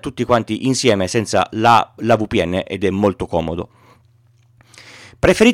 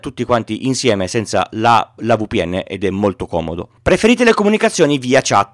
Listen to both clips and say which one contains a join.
second; 1 cut; at 3.8 s

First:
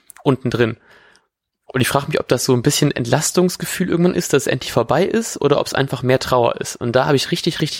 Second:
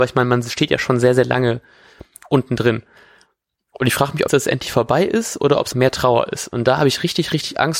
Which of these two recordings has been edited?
second; 2 cuts; at 4.3 s, 5.7 s

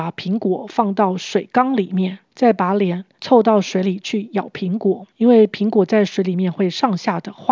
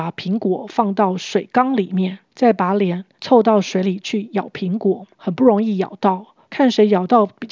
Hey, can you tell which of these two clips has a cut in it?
second; 1 cut; at 5.1 s

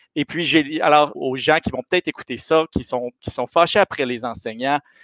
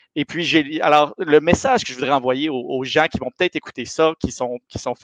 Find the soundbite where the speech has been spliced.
first; 1 cut; at 1.1 s

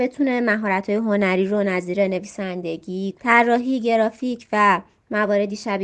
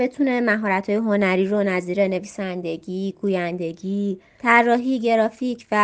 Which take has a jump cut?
first; 1 cut; at 3.2 s

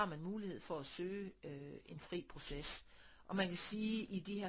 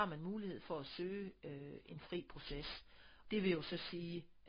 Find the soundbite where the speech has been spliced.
second; 1 cut; at 3.2 s

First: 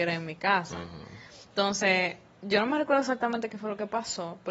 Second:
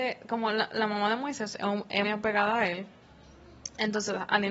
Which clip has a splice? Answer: second; 1 cut; at 2.0 s

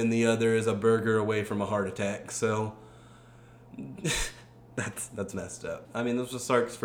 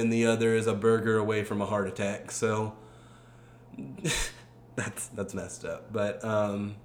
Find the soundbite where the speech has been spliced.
first; 1 cut; at 5.8 s

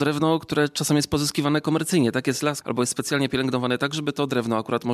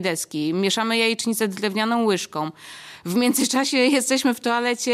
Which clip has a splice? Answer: first; 1 cut; at 2.6 s

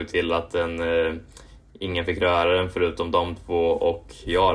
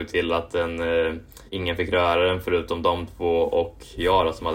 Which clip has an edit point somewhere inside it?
second; 1 cut; at 1.5 s

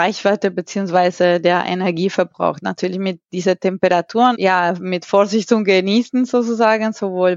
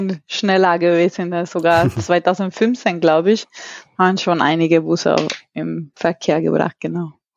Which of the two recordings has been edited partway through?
first; 1 cut; at 4.3 s

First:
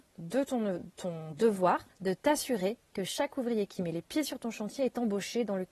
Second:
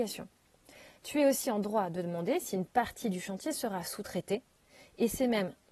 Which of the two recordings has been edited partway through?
first; 1 cut; at 1.9 s

